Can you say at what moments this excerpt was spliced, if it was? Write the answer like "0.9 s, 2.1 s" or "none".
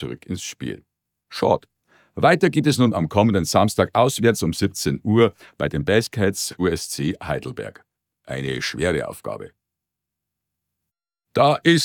none